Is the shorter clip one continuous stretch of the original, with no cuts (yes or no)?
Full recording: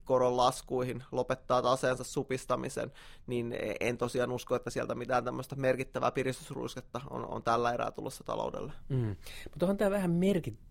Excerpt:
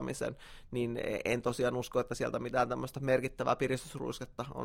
yes